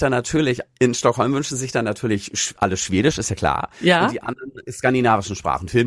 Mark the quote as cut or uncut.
uncut